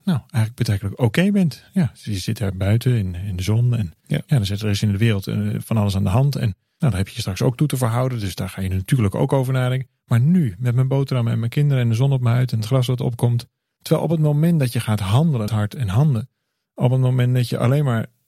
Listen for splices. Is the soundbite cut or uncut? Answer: cut